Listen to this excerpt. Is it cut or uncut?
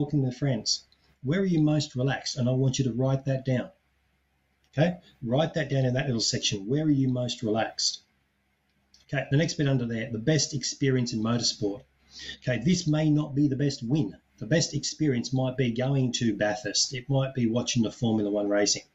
uncut